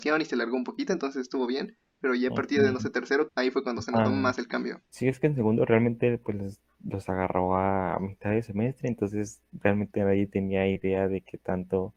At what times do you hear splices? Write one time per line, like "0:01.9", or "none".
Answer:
0:03.3
0:04.8